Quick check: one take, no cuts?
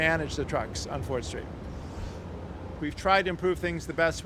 no; 1 cut; at 2.8 s

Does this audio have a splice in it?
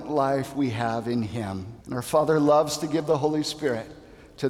yes; 1 cut; at 1.8 s

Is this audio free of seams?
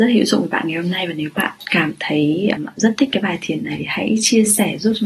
no; 1 cut; at 2.6 s

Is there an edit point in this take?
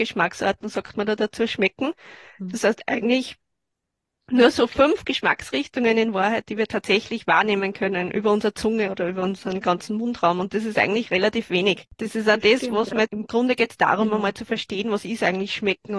yes; 1 cut; at 13.1 s

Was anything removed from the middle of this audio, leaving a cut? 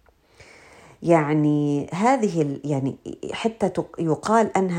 yes; 1 cut; at 1.9 s

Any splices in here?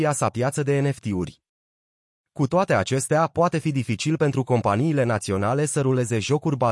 no; 0 cuts

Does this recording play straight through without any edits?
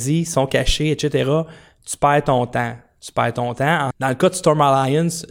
no; 1 cut; at 3.9 s

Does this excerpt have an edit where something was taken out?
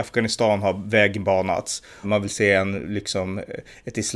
yes; 1 cut; at 2.0 s

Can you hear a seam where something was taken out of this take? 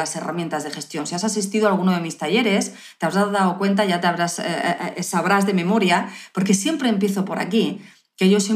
no; 0 cuts

